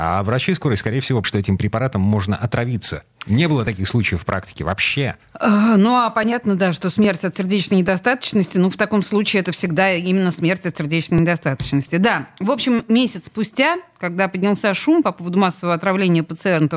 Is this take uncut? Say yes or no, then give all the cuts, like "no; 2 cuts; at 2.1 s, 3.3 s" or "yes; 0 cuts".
no; 1 cut; at 1.2 s